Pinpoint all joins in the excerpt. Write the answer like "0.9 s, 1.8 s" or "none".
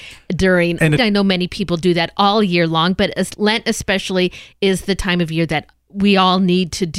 1.0 s